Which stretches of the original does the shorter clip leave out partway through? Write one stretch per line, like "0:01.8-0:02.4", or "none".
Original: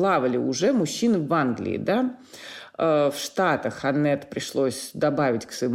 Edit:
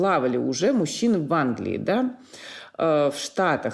none